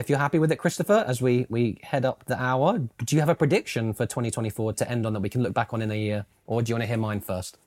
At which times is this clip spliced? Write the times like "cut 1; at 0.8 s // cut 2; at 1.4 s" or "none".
cut 1; at 4.7 s